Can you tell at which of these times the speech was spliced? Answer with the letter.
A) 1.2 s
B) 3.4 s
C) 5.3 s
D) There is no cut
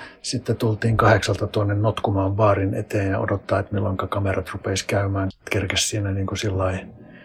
C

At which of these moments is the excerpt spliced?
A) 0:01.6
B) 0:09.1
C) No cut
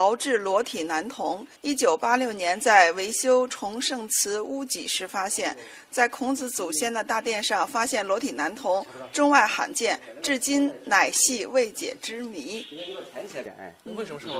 A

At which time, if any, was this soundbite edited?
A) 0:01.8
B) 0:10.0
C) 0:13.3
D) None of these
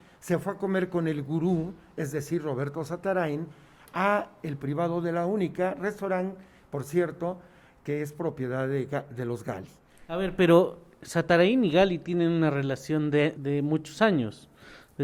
C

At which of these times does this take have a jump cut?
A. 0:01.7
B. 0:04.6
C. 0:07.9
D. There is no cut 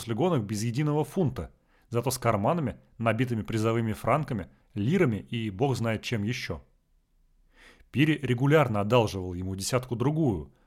B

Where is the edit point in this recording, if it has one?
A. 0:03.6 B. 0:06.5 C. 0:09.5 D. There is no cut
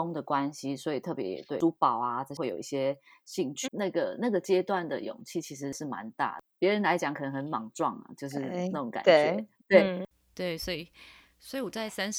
A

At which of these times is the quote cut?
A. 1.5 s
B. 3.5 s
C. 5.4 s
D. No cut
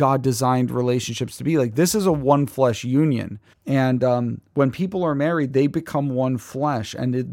B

